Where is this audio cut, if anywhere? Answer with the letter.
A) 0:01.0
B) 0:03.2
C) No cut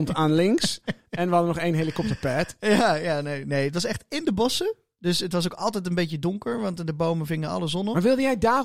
C